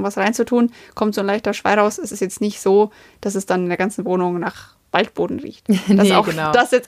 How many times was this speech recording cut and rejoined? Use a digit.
0